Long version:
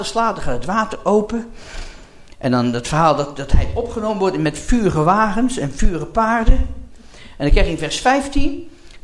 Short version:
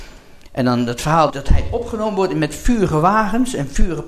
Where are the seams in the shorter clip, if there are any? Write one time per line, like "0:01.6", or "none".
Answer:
0:01.3